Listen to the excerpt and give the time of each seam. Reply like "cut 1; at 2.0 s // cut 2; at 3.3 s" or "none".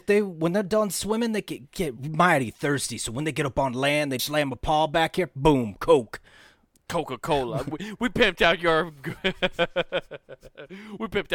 cut 1; at 4.2 s